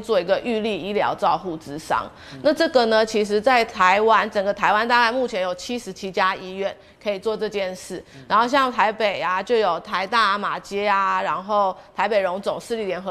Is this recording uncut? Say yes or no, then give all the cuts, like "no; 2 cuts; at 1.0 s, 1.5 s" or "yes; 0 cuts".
yes; 0 cuts